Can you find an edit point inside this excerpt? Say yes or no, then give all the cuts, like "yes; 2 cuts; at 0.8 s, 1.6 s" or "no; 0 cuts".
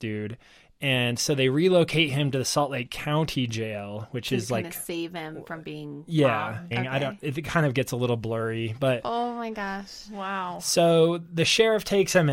yes; 1 cut; at 6.7 s